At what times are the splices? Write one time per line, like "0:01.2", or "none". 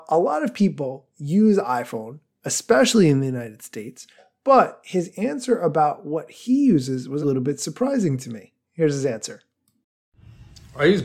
0:07.2